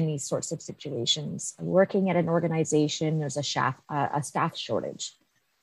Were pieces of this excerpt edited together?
no; 0 cuts

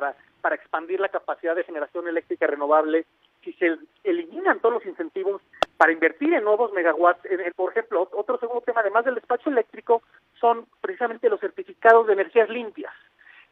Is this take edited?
yes; 1 cut; at 7.5 s

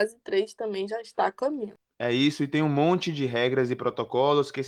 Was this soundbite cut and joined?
no; 0 cuts

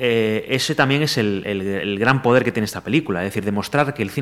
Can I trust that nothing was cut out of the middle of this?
yes; 0 cuts

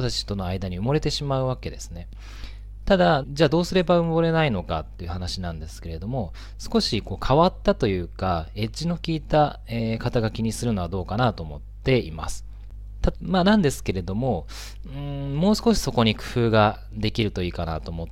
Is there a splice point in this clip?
yes; 2 cuts; at 3.2 s, 13.1 s

